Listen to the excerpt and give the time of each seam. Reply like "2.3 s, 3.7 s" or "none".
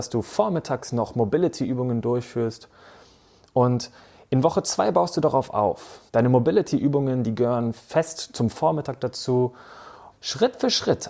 6.1 s, 10.1 s